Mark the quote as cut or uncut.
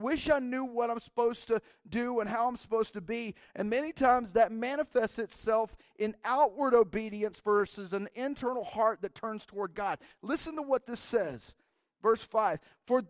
uncut